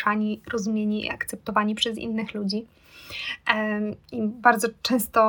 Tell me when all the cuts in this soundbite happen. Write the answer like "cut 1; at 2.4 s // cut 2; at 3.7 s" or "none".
none